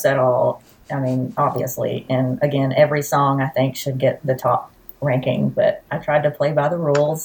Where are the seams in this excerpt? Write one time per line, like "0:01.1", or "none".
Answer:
none